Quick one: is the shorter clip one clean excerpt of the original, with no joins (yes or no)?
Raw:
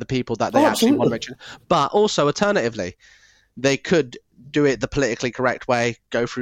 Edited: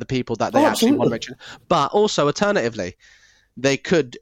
yes